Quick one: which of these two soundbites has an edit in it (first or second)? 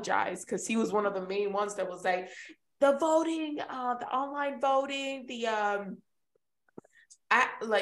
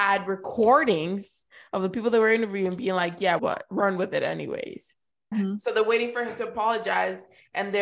second